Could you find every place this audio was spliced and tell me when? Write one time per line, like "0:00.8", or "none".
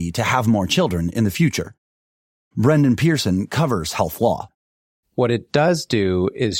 0:05.0